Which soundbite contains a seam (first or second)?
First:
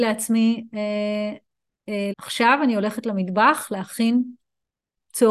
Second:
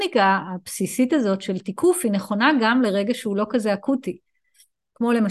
first